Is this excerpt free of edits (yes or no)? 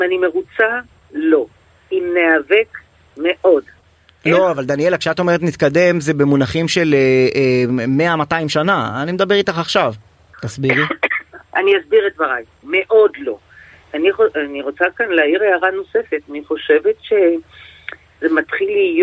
no